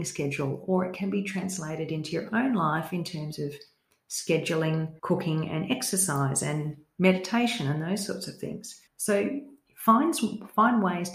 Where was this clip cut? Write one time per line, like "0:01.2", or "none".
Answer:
0:05.0
0:08.9